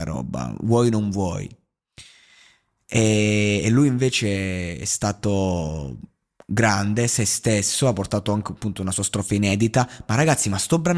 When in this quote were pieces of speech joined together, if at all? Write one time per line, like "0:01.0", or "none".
none